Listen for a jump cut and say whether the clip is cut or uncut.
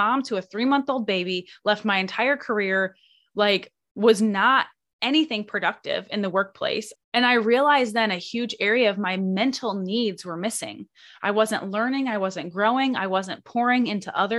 cut